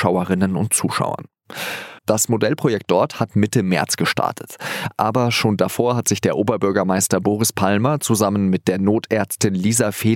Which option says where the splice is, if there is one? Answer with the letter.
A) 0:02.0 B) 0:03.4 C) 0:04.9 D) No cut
A